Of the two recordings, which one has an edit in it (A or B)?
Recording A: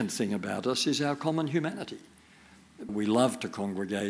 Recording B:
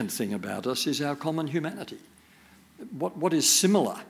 A